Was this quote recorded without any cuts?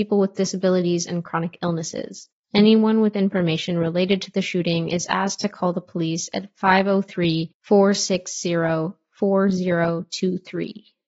no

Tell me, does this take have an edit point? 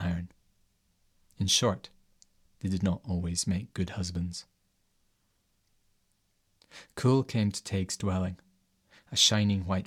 no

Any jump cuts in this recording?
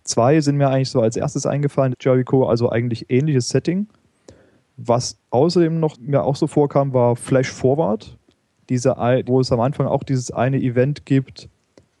yes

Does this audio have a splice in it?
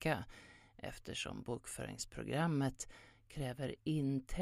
yes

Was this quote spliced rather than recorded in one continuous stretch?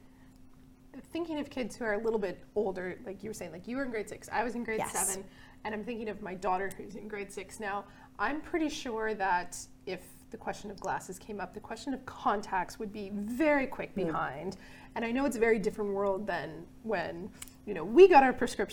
no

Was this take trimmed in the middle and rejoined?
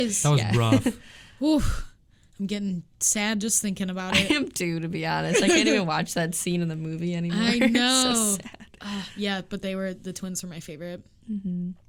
no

